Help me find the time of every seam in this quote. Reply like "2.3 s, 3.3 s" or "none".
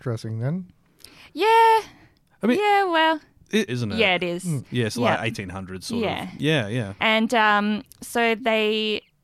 3.7 s, 7.0 s

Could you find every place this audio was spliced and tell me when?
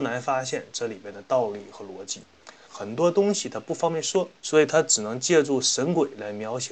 2.7 s, 4.4 s

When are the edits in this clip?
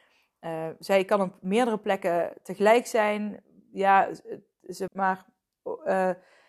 4.9 s

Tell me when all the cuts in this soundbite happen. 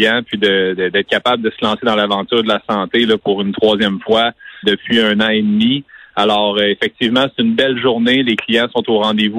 4.6 s

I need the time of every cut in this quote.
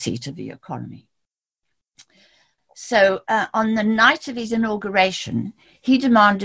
none

